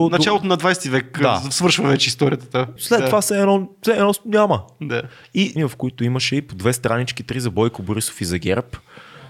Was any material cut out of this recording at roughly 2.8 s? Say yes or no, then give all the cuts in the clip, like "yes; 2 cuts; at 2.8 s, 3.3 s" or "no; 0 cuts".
yes; 2 cuts; at 2.8 s, 5.6 s